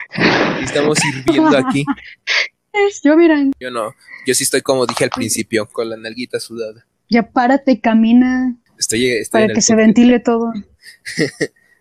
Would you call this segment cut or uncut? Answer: uncut